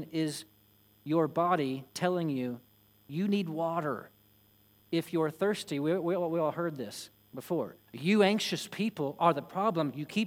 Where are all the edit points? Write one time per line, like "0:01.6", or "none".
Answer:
0:07.9